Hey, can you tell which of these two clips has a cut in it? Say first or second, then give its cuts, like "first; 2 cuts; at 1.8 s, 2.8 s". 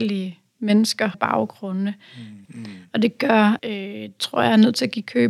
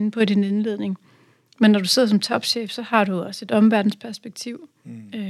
first; 3 cuts; at 1.1 s, 2.5 s, 3.6 s